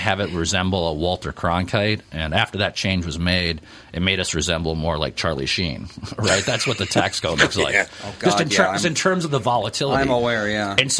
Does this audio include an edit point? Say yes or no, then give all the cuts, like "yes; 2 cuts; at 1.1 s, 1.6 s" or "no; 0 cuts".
no; 0 cuts